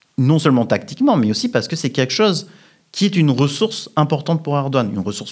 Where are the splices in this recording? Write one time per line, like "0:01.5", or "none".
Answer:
none

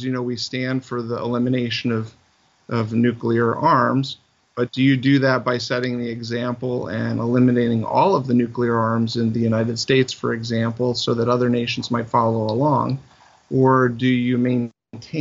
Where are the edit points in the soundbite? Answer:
none

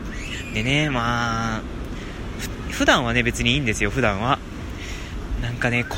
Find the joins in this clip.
none

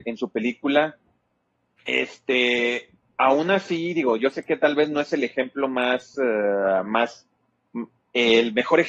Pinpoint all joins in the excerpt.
0:01.8

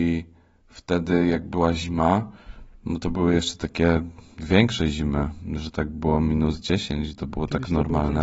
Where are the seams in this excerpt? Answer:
none

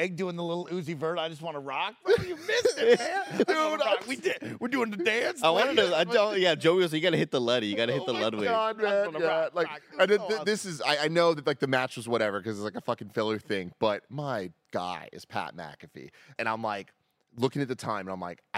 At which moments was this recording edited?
0:16.4

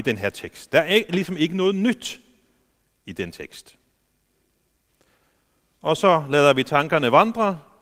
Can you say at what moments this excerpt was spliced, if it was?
0:01.1

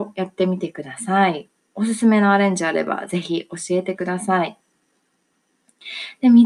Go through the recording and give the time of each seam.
none

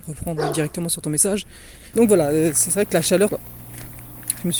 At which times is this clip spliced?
0:01.9
0:03.3

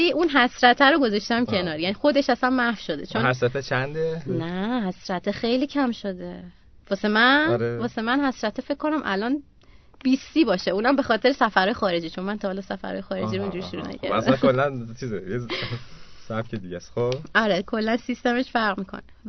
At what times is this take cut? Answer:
0:04.3

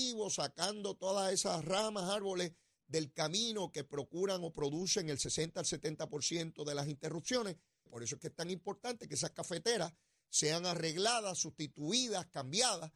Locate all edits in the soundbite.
0:07.9

